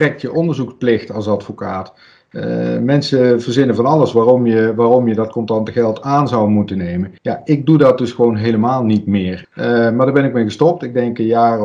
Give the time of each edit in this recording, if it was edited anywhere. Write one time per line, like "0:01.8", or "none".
0:07.2
0:09.4